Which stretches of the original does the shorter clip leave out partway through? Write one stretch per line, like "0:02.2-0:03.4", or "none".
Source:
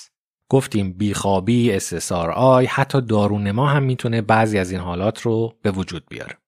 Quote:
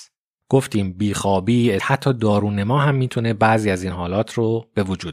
0:01.8-0:02.7